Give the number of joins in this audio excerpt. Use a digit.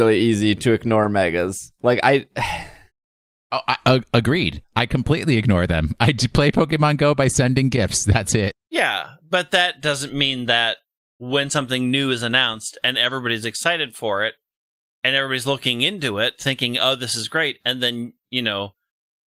1